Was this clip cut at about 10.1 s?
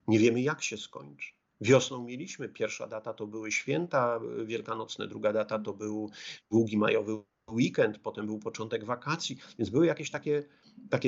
no; 1 cut; at 1.5 s

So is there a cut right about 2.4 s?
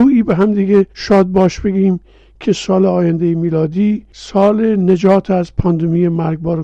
no; 1 cut; at 0.9 s

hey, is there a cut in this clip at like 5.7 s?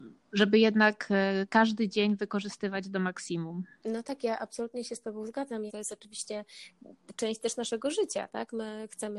yes; 1 cut; at 5.7 s

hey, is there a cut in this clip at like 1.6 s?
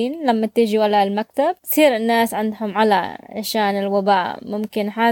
yes; 1 cut; at 1.6 s

